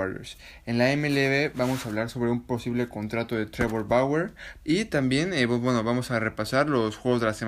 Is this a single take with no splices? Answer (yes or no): no